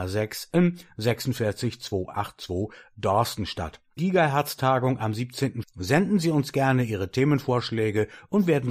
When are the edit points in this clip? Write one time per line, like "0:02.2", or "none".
0:04.0
0:05.6